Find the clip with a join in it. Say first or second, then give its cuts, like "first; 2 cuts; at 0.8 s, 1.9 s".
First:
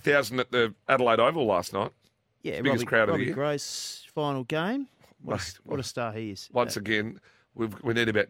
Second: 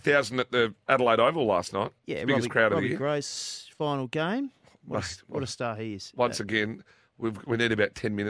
second; 1 cut; at 2.0 s